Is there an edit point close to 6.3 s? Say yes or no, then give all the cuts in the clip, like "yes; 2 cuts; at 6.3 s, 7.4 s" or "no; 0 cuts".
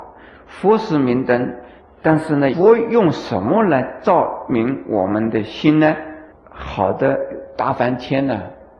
yes; 1 cut; at 6.3 s